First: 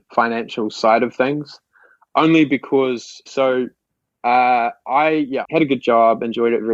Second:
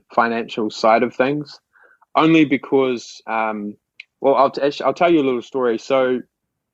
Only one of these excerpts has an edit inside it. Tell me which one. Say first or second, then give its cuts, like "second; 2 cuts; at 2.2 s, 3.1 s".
first; 2 cuts; at 3.3 s, 5.4 s